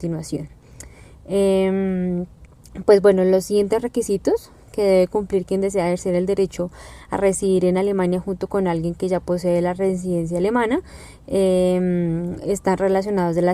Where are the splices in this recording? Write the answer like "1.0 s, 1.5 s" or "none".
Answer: none